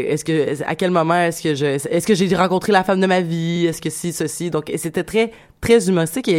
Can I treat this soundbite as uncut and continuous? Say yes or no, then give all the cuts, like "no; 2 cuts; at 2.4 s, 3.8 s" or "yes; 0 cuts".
yes; 0 cuts